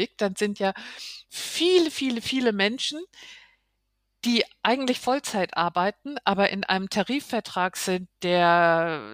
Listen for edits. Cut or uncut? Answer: uncut